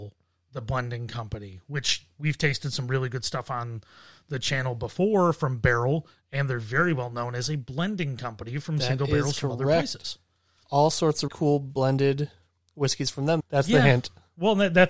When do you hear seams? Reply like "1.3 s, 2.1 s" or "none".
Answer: 11.3 s, 13.4 s